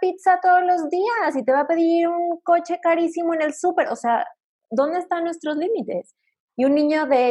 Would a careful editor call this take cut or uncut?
cut